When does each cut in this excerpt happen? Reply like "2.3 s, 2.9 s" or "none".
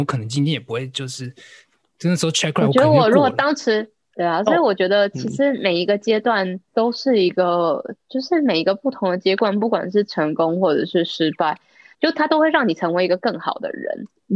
4.1 s, 11.9 s